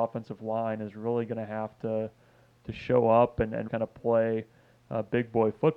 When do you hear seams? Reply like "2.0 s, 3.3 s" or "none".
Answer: 3.7 s